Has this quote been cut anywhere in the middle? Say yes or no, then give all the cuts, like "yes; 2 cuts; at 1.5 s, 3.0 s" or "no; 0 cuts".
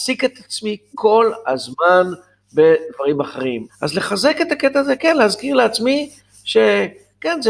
yes; 1 cut; at 3.7 s